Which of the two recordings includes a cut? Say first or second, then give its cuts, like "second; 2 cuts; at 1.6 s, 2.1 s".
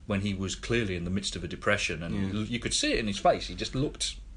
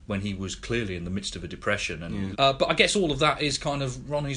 second; 1 cut; at 2.3 s